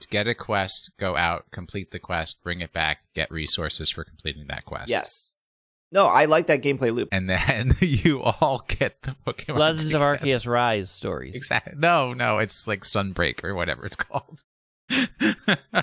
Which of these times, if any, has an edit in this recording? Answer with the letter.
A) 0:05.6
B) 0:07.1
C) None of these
B